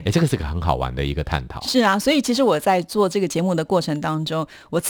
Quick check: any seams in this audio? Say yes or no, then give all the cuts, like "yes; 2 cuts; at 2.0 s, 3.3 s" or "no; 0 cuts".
no; 0 cuts